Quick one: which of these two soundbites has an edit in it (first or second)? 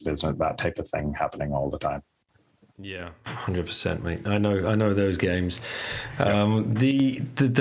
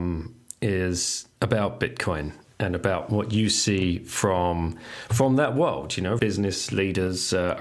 second